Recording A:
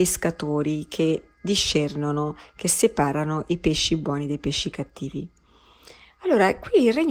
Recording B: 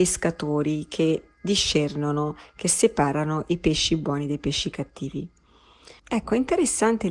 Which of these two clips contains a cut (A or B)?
B